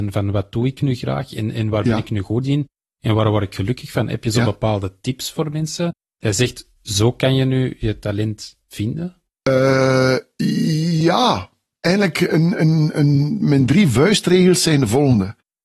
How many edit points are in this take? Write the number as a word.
zero